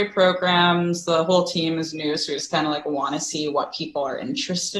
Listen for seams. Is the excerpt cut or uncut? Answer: uncut